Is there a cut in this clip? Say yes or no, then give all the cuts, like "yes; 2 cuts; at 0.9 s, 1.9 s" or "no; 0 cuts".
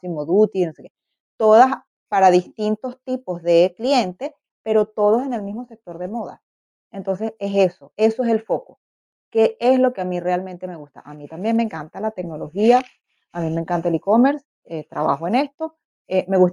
no; 0 cuts